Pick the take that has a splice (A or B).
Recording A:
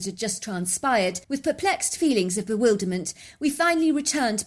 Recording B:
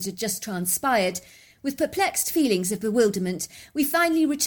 A